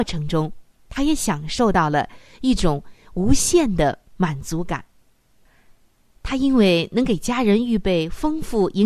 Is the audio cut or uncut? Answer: cut